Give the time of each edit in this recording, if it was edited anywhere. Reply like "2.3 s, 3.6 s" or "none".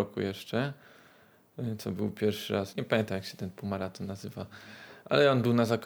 2.7 s